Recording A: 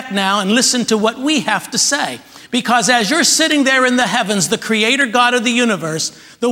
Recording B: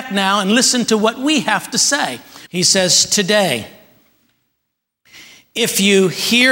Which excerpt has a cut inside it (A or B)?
B